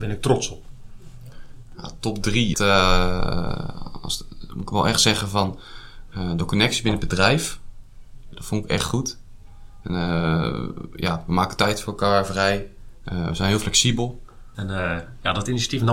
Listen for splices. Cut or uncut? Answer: cut